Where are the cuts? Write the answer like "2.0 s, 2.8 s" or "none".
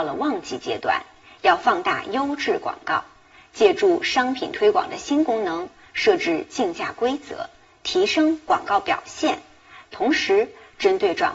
9.9 s

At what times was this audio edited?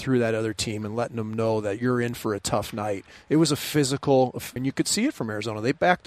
4.6 s

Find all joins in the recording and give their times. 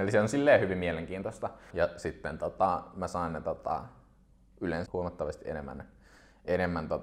1.7 s, 4.9 s

